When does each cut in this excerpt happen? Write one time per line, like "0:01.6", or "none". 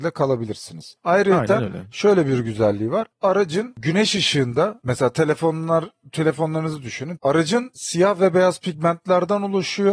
0:07.2